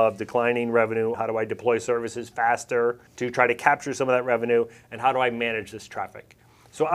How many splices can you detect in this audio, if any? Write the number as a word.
two